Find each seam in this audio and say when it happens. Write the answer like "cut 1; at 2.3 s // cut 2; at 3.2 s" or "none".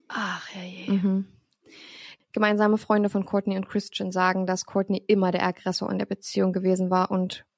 none